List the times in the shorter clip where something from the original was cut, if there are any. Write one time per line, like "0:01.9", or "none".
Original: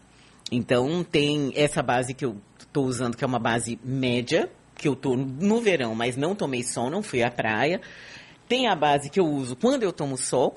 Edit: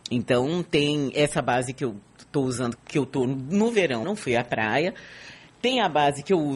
0:02.8
0:04.0